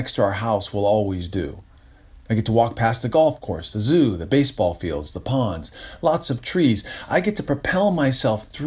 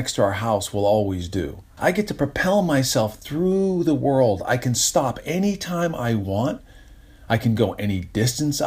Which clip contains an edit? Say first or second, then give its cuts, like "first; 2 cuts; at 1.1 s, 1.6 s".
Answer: second; 1 cut; at 1.8 s